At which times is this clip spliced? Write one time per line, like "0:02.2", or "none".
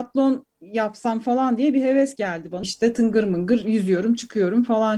0:02.6